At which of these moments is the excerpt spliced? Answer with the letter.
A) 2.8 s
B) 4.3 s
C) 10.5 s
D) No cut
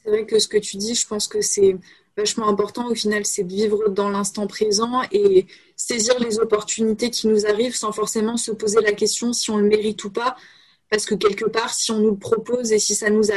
D